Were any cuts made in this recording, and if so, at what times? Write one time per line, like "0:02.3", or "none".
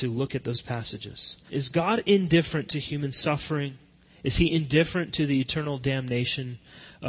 0:01.5